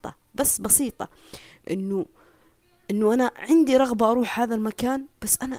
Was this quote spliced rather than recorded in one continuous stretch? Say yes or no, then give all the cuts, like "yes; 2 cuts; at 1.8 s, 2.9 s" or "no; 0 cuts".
no; 0 cuts